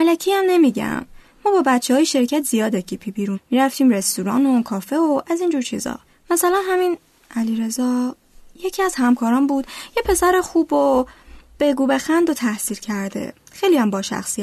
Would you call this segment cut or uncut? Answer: cut